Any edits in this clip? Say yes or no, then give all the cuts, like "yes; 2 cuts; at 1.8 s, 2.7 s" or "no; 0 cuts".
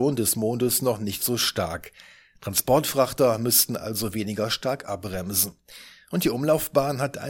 no; 0 cuts